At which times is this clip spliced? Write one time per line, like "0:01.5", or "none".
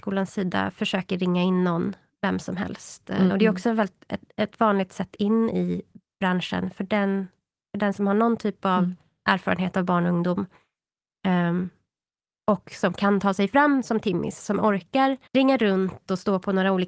0:03.3
0:15.3